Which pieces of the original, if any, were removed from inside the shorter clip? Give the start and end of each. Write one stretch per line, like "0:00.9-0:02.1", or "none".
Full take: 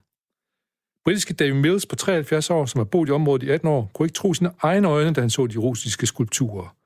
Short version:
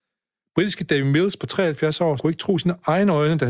0:02.7-0:03.9